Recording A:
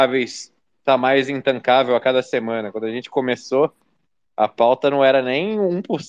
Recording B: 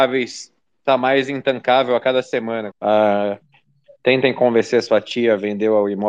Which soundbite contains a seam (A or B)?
B